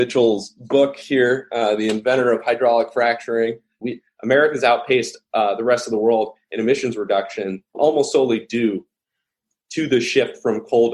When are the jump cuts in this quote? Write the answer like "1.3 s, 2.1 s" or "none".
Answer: 3.8 s, 7.7 s